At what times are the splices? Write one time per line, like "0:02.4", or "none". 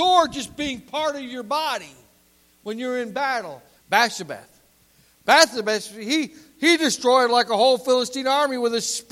0:03.8